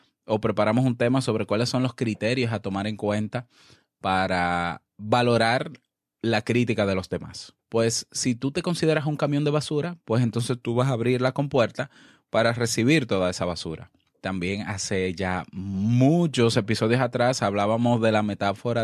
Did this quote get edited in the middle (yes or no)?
yes